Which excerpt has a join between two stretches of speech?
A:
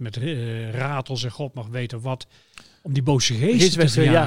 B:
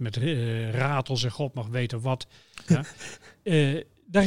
B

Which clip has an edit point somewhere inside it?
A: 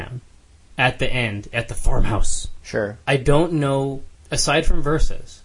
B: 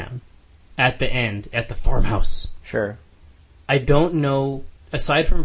A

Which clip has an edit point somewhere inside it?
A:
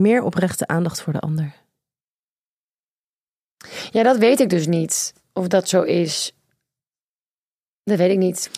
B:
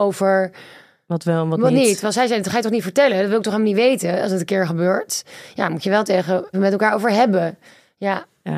B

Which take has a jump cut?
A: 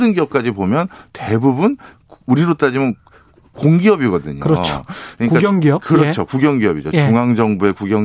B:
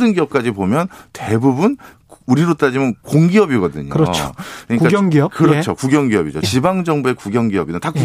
B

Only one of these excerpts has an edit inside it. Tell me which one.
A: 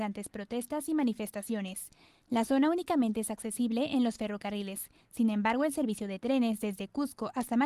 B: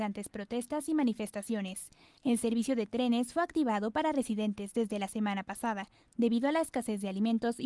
B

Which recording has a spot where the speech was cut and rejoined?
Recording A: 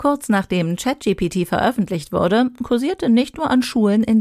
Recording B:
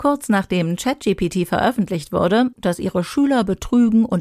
B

